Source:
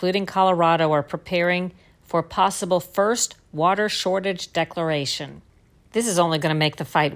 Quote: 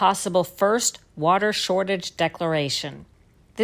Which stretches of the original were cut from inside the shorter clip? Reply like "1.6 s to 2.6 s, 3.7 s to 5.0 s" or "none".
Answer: none